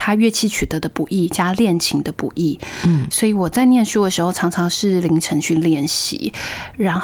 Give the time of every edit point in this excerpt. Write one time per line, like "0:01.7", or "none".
none